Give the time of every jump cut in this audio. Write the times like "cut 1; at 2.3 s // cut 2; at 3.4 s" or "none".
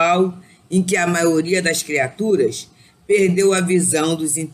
none